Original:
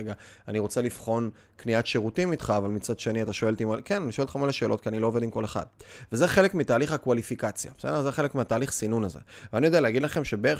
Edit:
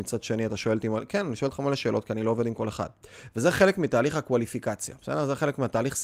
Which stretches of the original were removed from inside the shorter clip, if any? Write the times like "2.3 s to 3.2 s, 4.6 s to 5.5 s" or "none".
none